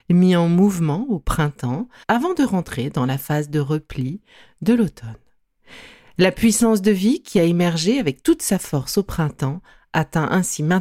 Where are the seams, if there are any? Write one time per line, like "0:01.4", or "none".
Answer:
0:02.0